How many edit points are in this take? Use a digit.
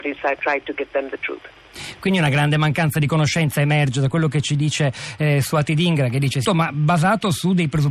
1